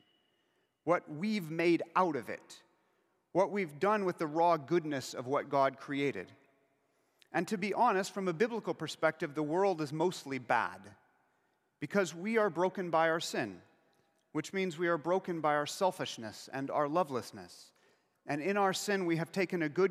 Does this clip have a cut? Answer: no; 0 cuts

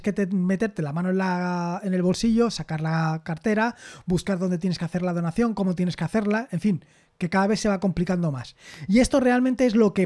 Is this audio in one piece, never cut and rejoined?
yes; 0 cuts

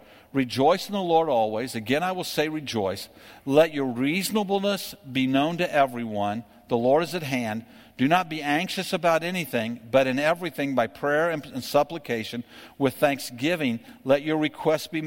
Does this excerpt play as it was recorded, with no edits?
yes; 0 cuts

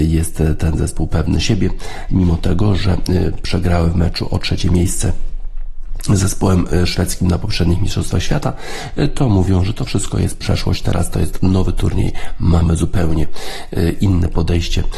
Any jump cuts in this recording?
yes; 1 cut; at 2.1 s

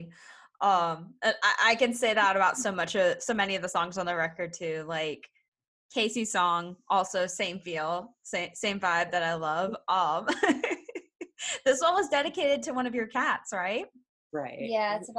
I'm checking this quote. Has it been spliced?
no; 0 cuts

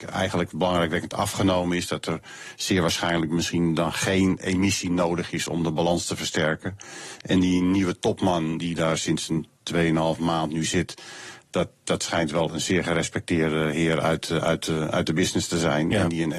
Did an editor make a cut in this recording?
no; 0 cuts

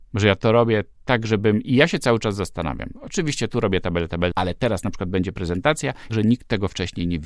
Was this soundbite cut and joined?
yes; 2 cuts; at 4.3 s, 6.1 s

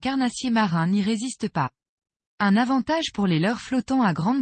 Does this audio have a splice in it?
yes; 1 cut; at 2.3 s

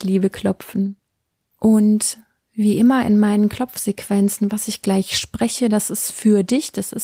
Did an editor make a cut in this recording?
yes; 1 cut; at 1.6 s

